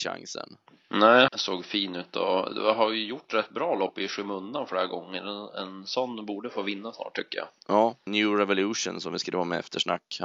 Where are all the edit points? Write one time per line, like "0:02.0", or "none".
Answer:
0:01.3
0:08.1